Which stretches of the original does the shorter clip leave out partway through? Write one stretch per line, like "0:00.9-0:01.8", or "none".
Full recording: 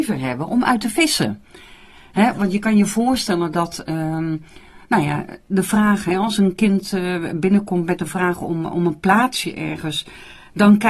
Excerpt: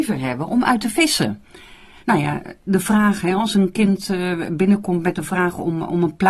0:02.0-0:04.8